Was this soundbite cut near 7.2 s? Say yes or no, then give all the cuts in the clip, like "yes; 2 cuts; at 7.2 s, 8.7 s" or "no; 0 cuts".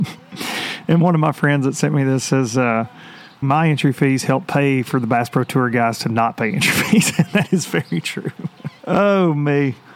no; 2 cuts; at 3.4 s, 8.8 s